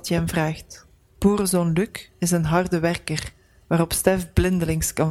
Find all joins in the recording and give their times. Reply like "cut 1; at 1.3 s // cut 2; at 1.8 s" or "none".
cut 1; at 1.1 s